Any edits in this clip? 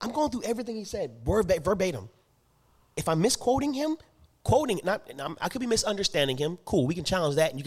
no; 0 cuts

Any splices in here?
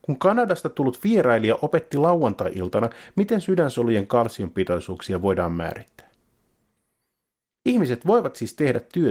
no; 0 cuts

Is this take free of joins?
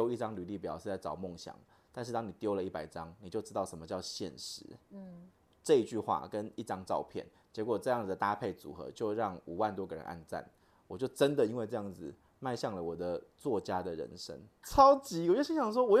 no; 1 cut; at 14.6 s

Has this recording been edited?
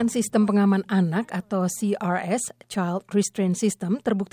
no; 0 cuts

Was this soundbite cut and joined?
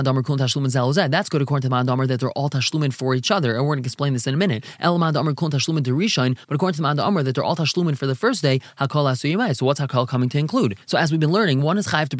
no; 0 cuts

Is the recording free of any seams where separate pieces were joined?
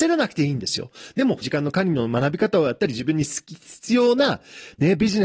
no; 1 cut; at 1.4 s

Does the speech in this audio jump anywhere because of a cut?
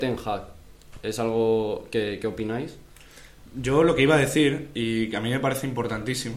no; 0 cuts

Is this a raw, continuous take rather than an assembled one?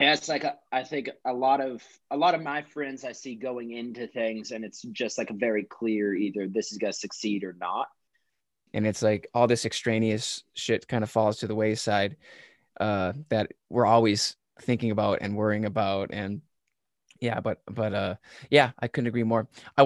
no; 1 cut; at 8.7 s

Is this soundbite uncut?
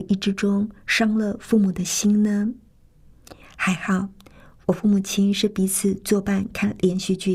no; 1 cut; at 3.4 s

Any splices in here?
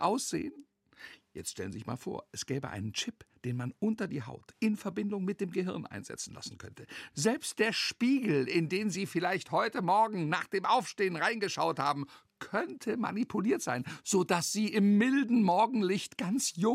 yes; 1 cut; at 7.1 s

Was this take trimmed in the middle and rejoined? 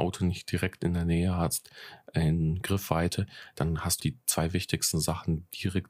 yes; 1 cut; at 4.0 s

